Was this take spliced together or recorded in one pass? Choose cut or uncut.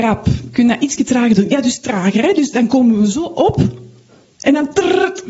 uncut